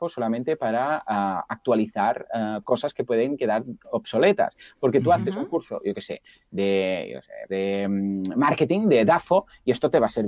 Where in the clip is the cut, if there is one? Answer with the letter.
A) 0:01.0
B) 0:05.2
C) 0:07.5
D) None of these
C